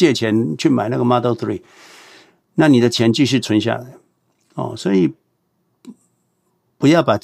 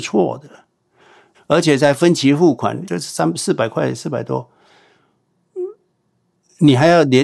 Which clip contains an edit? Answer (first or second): second